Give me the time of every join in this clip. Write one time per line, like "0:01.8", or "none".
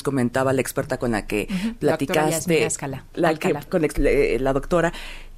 0:03.7